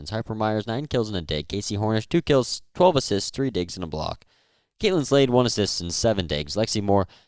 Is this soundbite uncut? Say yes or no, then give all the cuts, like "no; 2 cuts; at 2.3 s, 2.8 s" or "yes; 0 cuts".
no; 1 cut; at 3.3 s